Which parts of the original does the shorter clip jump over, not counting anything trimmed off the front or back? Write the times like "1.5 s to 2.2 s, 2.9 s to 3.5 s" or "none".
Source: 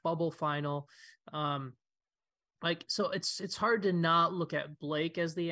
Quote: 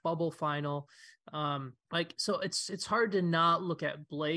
1.8 s to 2.5 s